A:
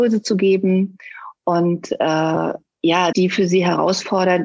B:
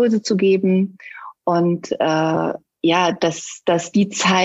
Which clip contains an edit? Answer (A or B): A